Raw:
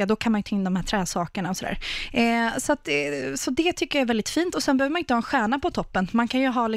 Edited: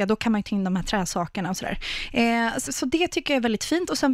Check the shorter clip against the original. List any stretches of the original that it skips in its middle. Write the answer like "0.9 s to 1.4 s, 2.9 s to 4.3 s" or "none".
2.7 s to 3.3 s